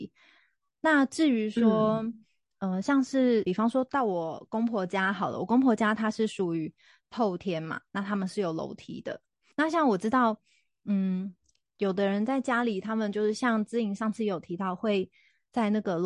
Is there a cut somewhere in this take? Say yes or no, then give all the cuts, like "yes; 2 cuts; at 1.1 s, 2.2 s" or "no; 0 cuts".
no; 0 cuts